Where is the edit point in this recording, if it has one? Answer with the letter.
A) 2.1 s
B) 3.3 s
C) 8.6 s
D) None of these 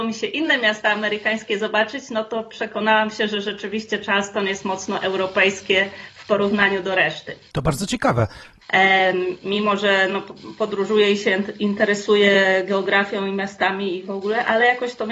C